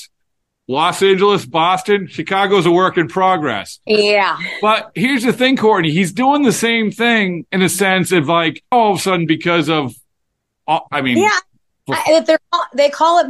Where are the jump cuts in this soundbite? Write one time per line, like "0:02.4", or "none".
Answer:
0:08.7
0:10.9